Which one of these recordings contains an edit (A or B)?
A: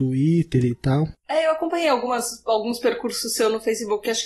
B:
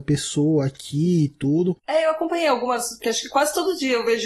B